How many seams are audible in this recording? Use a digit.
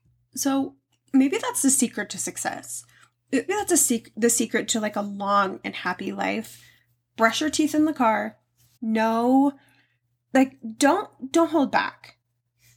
2